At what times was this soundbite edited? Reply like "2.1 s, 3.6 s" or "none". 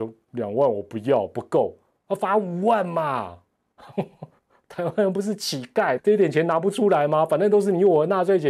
6.0 s